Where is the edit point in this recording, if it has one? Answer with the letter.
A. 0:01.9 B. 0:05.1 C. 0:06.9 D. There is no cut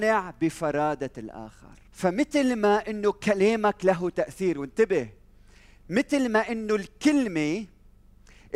A